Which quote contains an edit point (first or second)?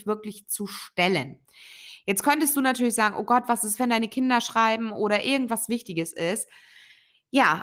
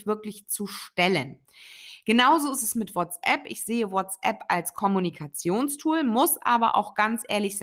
first